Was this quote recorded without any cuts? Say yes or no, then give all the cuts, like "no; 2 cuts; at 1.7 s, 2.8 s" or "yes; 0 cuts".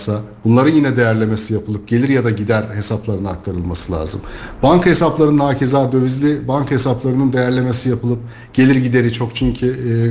yes; 0 cuts